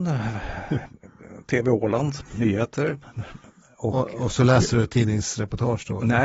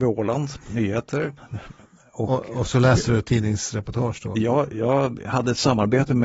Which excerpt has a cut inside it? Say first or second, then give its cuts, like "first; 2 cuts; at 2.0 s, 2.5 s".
second; 1 cut; at 4.3 s